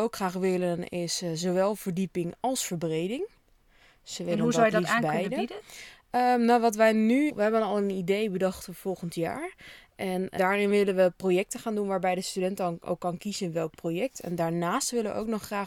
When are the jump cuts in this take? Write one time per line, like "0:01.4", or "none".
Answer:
0:07.3
0:10.4